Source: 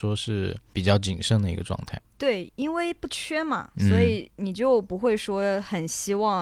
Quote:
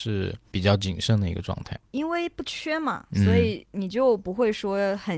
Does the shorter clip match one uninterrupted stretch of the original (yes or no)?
no